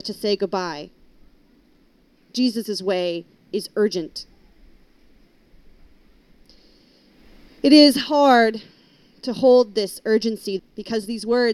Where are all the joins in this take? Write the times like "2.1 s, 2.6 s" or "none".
10.6 s

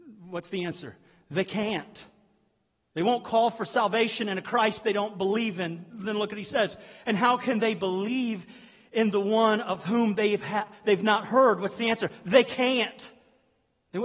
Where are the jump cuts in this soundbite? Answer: none

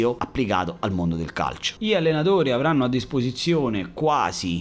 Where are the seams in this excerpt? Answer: 1.8 s

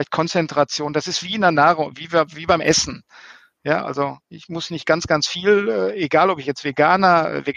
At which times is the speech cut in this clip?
none

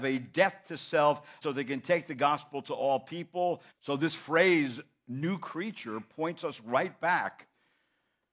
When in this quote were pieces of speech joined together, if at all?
1.4 s, 3.7 s

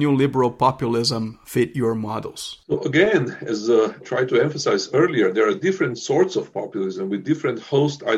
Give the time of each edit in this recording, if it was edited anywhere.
4.0 s

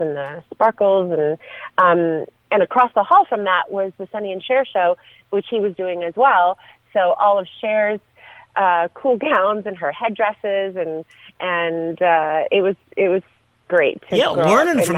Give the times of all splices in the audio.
13.6 s

